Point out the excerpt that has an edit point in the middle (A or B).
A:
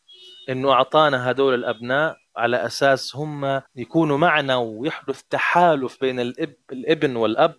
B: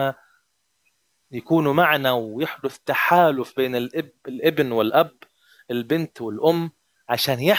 A